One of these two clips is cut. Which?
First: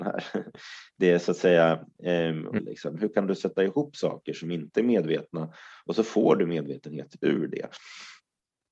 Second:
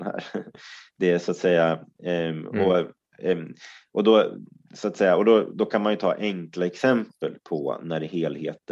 first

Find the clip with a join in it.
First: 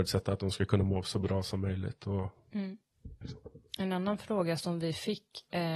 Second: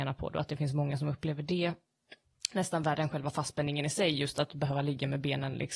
first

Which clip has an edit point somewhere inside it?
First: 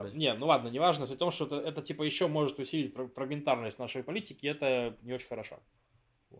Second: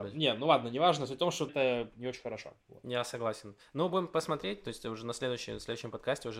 second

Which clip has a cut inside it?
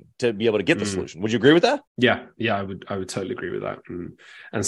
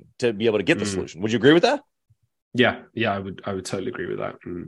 first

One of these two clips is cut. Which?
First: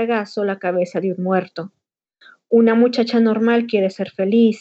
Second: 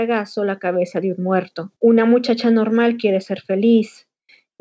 second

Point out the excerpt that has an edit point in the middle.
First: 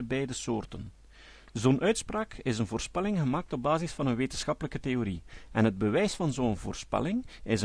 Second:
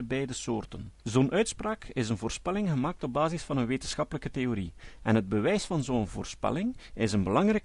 second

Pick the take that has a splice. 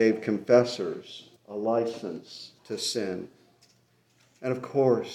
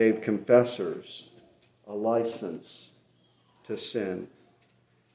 first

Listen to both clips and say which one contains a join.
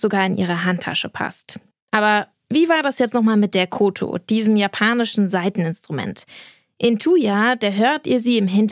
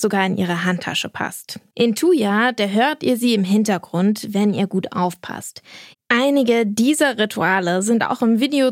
second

